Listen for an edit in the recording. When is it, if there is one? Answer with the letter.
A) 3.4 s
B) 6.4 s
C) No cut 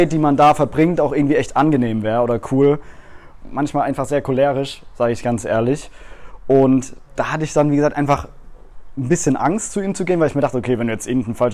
A